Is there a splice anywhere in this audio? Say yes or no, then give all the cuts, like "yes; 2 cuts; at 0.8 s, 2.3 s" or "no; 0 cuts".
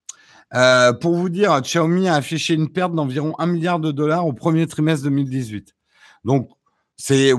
no; 0 cuts